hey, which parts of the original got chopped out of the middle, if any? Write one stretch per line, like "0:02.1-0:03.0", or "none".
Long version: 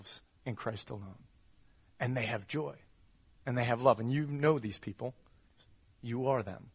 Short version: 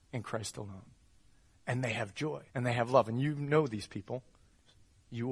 0:02.8-0:03.4